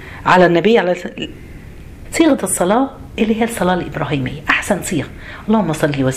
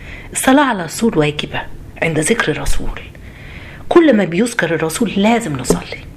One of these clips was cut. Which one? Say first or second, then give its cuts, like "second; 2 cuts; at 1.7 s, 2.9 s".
first; 1 cut; at 2.0 s